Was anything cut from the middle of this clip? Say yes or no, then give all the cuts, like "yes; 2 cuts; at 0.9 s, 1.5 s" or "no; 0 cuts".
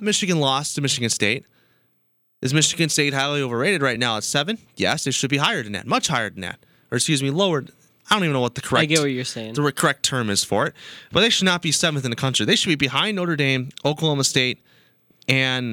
no; 0 cuts